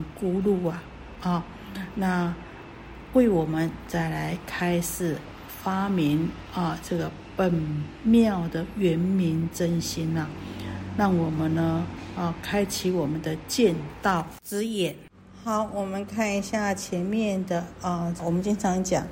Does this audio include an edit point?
yes; 1 cut; at 18.2 s

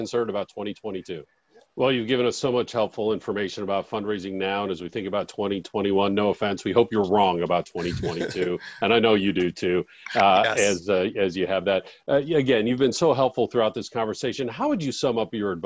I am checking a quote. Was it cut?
yes; 1 cut; at 1.7 s

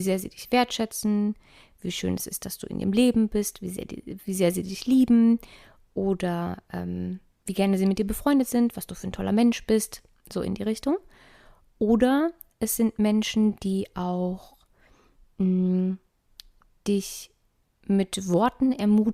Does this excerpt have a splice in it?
no; 0 cuts

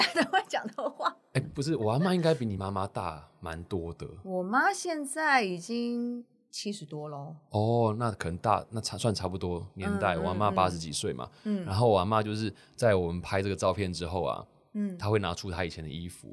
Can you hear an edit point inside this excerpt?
no; 0 cuts

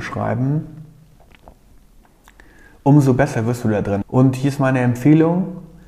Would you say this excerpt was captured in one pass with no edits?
no; 1 cut; at 4.0 s

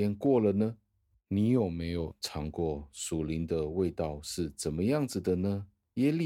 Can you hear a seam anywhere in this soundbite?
no; 0 cuts

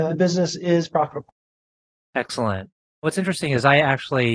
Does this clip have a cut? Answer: no; 0 cuts

